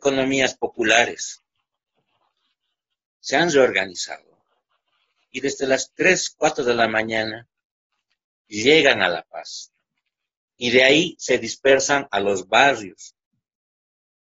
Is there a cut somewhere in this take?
yes; 1 cut; at 10.5 s

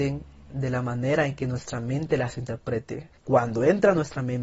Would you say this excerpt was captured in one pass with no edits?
no; 1 cut; at 3.2 s

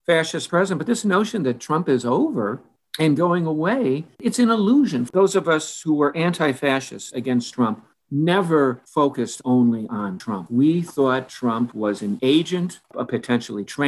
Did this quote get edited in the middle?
no; 0 cuts

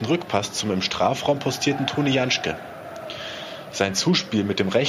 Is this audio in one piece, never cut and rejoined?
yes; 0 cuts

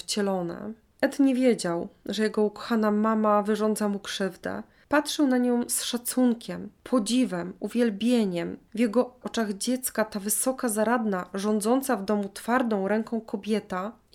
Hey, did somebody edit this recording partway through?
yes; 1 cut; at 9.2 s

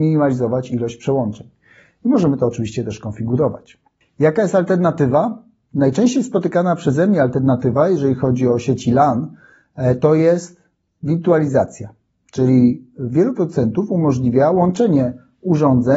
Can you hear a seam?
no; 0 cuts

